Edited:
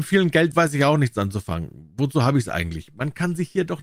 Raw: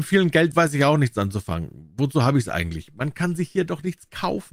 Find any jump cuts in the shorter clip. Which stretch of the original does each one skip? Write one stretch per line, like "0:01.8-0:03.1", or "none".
none